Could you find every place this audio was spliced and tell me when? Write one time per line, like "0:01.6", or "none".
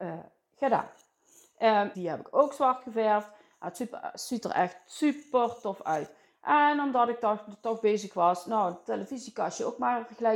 0:01.9
0:06.3